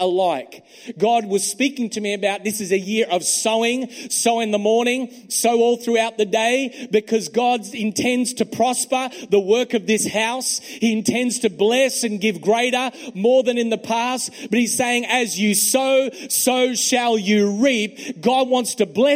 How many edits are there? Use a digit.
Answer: 1